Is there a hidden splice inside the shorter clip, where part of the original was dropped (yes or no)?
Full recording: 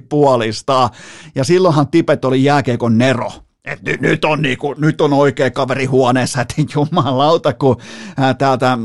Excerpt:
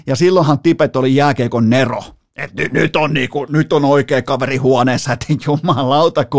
no